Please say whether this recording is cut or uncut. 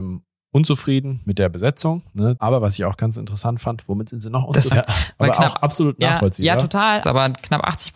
cut